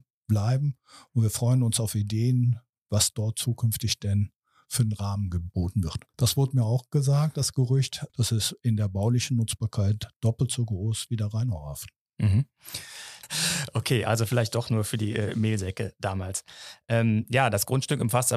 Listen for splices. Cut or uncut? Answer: cut